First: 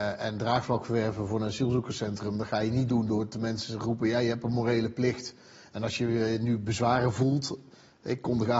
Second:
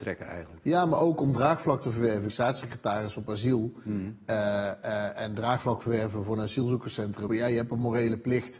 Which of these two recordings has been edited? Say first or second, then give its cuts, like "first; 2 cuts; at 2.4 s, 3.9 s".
second; 2 cuts; at 2.3 s, 7.3 s